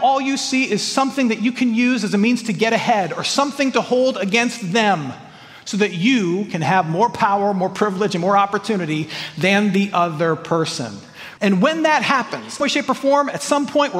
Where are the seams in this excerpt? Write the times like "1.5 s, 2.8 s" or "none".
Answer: 11.4 s, 12.6 s